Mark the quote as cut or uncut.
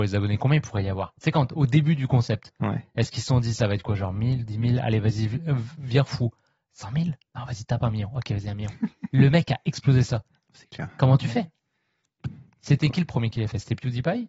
uncut